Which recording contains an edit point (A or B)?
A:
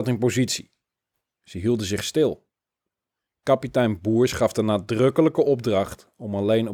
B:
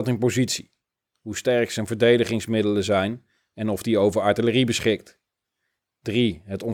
B